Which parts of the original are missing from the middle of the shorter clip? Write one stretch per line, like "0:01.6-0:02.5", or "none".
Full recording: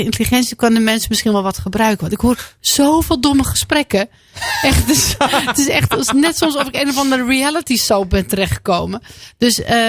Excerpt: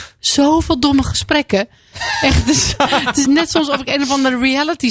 0:05.7-0:06.1